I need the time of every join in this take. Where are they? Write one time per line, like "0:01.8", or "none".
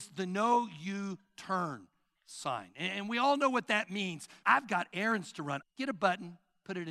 0:04.4
0:05.6

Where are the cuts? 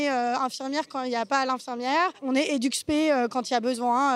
none

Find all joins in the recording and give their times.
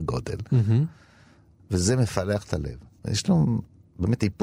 0:01.6
0:03.0

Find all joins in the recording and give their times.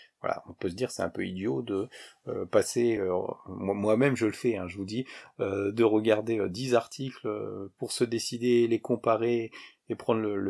none

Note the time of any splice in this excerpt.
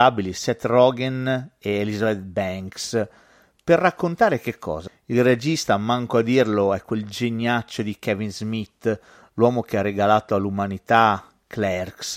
0:04.9

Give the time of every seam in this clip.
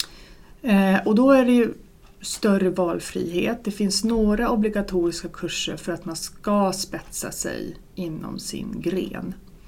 none

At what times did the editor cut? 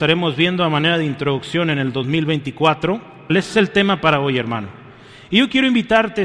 0:03.3

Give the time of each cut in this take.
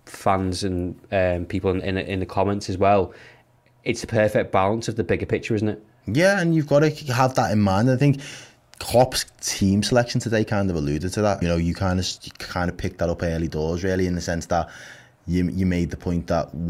0:11.4

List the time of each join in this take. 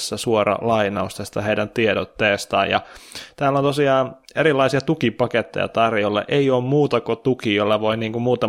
none

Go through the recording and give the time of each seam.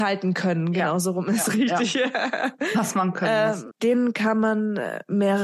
0:03.7

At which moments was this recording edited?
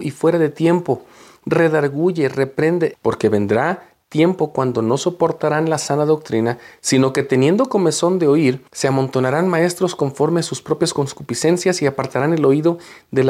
0:02.9
0:08.7

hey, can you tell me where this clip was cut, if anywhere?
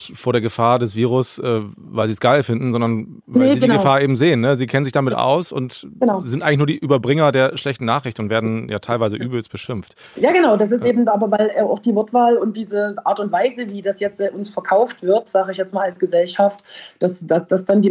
0:10.1

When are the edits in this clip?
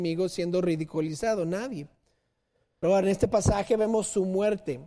0:02.8

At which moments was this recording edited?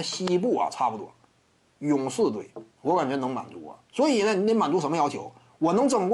0:02.7
0:03.9

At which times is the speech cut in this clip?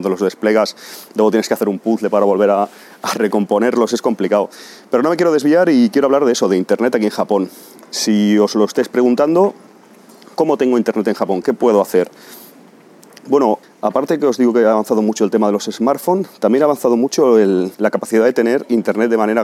0:11.4
0:13.6
0:17.7

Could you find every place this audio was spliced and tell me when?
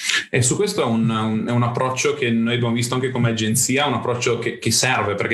none

